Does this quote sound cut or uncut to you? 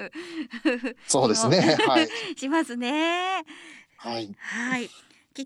uncut